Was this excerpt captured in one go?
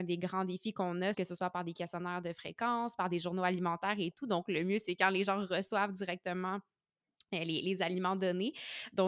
no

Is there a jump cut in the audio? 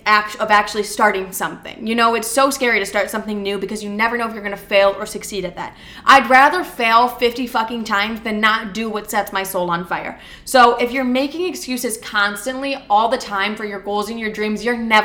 no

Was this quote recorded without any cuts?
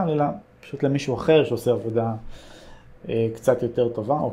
yes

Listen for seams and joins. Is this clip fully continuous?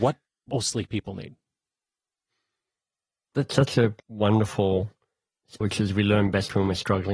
no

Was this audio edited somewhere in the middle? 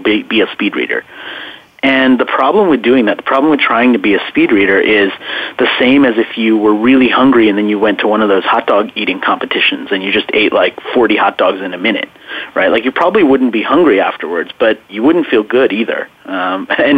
no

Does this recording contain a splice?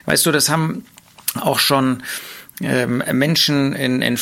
no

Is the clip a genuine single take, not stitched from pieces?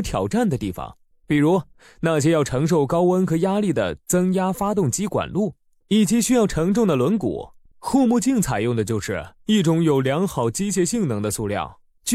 no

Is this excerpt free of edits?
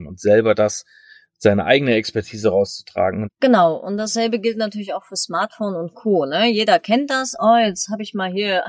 no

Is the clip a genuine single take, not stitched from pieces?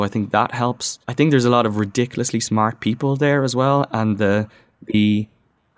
no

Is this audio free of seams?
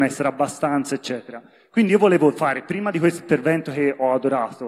yes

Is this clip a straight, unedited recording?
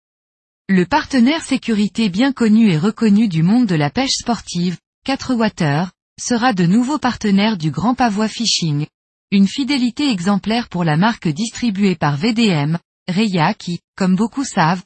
yes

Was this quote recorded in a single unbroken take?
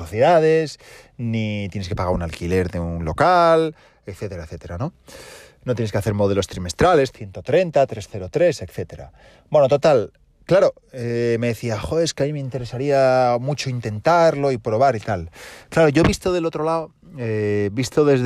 yes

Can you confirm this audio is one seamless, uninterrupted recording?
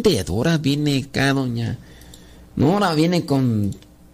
yes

